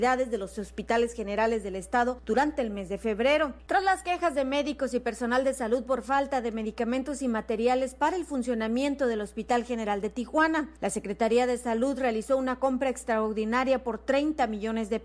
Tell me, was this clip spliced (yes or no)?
yes